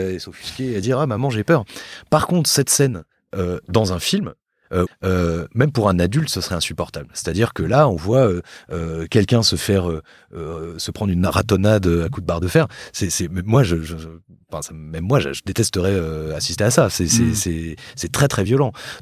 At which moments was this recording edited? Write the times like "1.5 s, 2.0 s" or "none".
4.9 s